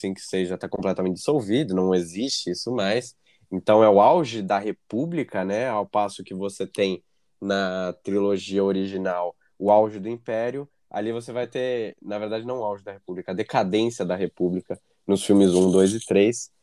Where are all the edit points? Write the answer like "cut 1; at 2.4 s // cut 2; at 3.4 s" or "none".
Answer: none